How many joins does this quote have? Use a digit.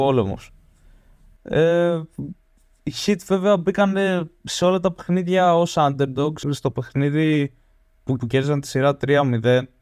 2